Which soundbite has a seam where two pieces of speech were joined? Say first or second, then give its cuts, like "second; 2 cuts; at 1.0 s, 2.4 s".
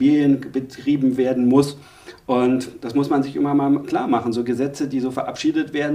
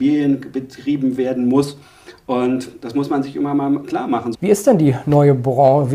second; 1 cut; at 4.3 s